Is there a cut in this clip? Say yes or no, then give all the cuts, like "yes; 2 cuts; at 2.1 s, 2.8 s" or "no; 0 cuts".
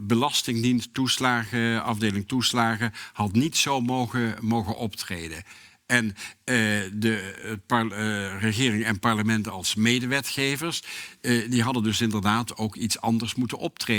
no; 0 cuts